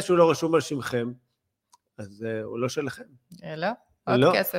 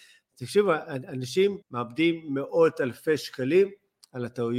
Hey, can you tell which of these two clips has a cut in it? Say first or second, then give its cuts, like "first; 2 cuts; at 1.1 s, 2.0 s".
second; 1 cut; at 1.6 s